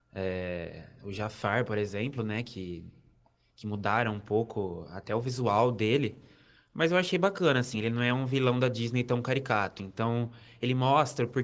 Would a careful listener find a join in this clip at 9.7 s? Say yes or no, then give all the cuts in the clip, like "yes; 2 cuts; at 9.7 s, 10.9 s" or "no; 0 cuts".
no; 1 cut; at 7.7 s